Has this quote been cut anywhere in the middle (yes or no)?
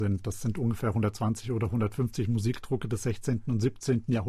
no